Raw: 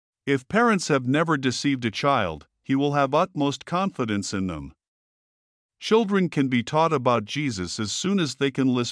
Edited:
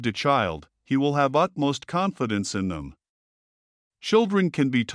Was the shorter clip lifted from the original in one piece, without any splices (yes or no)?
yes